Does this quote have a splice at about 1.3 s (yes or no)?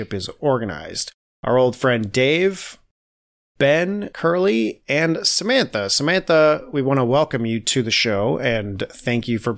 yes